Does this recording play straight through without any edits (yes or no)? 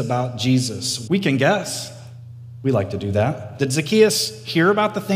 no